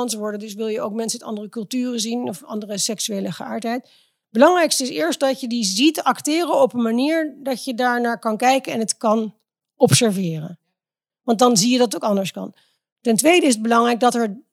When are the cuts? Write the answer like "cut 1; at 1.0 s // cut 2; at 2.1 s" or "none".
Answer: none